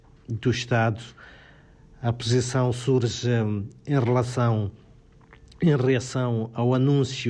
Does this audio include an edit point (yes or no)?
no